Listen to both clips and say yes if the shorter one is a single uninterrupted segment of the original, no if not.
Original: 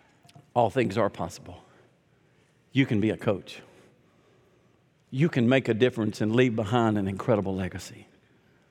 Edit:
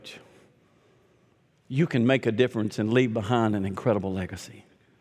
yes